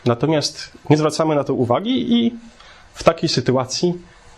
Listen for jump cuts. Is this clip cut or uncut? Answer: uncut